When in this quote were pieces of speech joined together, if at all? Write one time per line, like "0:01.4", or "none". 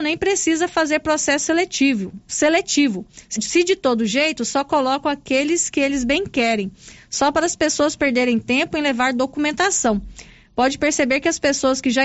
0:03.4